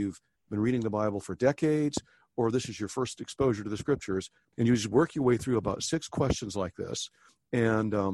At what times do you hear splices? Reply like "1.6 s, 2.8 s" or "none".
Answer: 4.5 s